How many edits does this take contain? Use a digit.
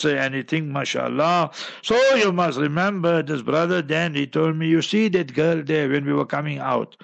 0